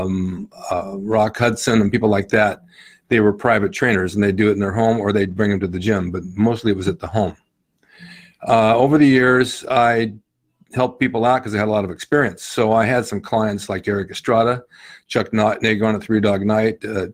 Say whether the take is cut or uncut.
uncut